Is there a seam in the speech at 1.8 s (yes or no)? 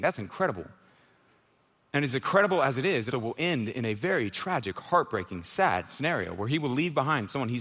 no